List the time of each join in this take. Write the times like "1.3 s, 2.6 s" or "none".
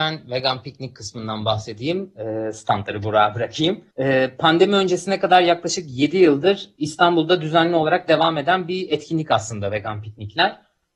3.9 s